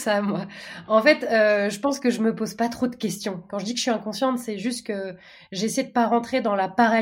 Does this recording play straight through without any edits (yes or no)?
yes